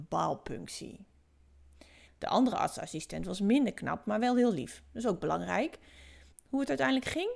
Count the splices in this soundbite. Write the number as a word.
two